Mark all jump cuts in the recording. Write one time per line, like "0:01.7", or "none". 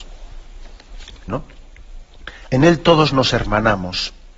0:01.3
0:02.5